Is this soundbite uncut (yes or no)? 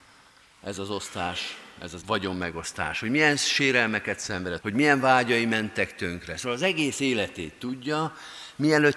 no